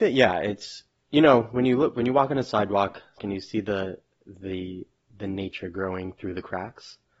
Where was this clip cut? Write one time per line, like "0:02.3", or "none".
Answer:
0:03.2